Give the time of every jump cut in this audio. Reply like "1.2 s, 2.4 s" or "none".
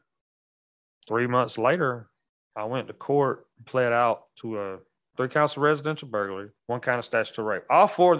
6.6 s

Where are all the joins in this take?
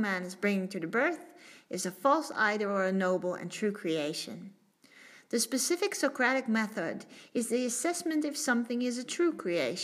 none

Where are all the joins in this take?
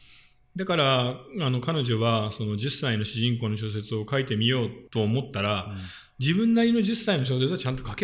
4.9 s

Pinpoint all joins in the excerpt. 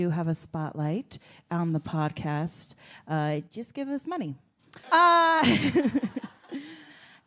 4.8 s

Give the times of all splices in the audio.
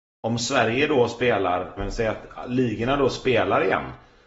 1.8 s

